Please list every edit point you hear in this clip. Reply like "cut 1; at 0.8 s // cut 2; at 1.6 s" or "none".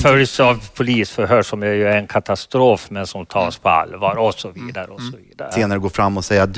cut 1; at 5.5 s